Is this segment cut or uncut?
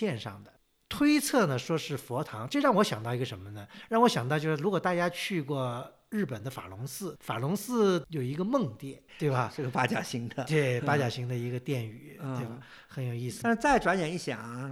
cut